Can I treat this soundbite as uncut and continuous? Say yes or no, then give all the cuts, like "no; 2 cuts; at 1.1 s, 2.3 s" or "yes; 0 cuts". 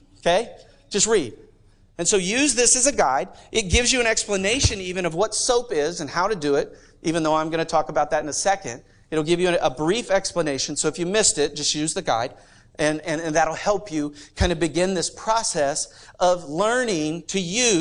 yes; 0 cuts